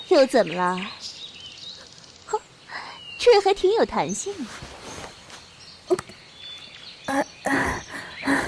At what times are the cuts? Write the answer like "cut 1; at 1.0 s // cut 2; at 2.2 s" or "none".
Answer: none